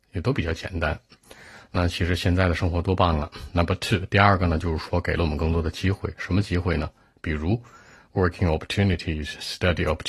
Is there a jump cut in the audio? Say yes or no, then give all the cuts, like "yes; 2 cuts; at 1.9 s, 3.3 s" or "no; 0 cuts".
no; 0 cuts